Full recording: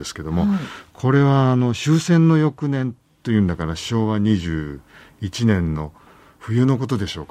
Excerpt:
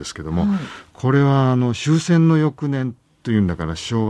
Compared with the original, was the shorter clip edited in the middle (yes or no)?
no